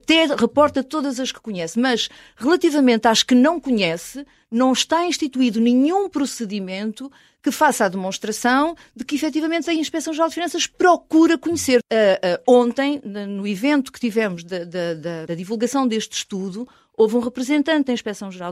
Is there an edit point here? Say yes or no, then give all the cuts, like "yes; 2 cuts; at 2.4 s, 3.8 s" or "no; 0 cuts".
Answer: yes; 2 cuts; at 11.8 s, 15.3 s